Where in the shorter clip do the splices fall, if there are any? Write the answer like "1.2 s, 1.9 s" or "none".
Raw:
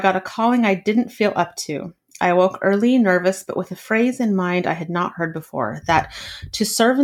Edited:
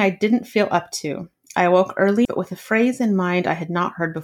2.2 s